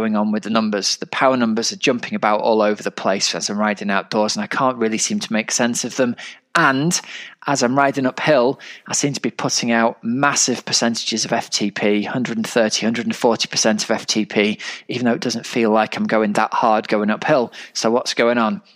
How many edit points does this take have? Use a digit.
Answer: 0